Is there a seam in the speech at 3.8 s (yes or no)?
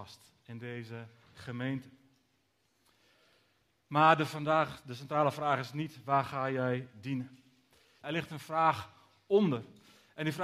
no